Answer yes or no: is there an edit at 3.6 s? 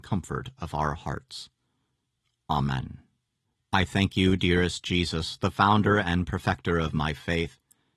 yes